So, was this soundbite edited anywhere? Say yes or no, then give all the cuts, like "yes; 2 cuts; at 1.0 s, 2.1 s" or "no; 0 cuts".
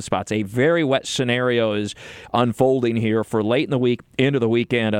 no; 0 cuts